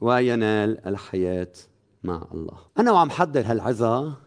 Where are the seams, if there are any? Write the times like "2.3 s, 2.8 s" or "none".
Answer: 2.7 s